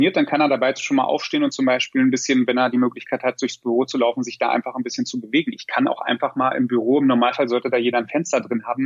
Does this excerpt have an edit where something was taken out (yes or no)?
no